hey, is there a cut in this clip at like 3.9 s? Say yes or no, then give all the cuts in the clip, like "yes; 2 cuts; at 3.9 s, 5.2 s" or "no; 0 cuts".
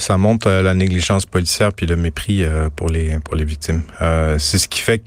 no; 0 cuts